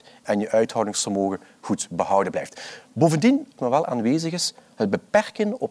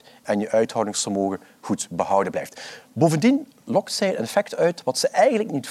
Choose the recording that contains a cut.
first; 1 cut; at 3.6 s

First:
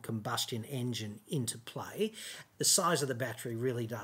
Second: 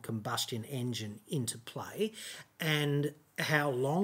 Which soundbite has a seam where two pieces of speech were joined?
first; 1 cut; at 2.5 s

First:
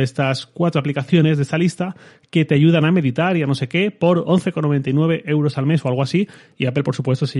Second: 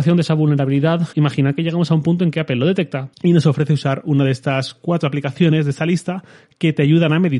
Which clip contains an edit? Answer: second; 2 cuts; at 1.1 s, 3.1 s

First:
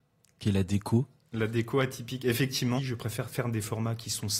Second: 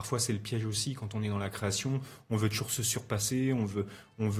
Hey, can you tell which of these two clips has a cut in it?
first; 1 cut; at 2.8 s

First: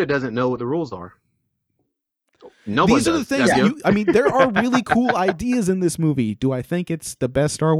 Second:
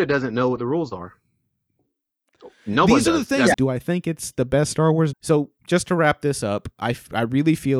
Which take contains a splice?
second; 2 cuts; at 3.5 s, 5.1 s

